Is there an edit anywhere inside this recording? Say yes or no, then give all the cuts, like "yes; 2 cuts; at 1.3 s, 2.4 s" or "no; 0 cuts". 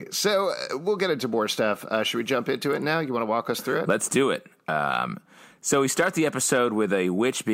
no; 0 cuts